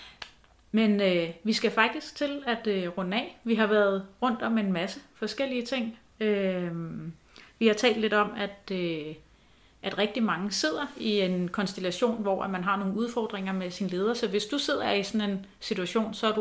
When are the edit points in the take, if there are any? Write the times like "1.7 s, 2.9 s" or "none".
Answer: none